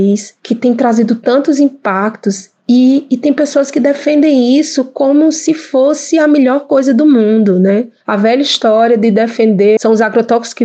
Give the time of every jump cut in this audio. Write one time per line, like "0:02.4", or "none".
none